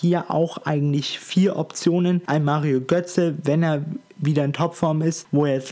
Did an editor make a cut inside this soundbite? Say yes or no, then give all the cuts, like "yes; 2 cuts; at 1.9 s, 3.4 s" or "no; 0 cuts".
yes; 1 cut; at 2.3 s